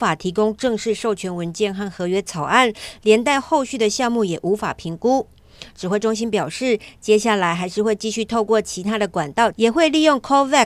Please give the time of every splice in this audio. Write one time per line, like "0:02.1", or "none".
0:09.5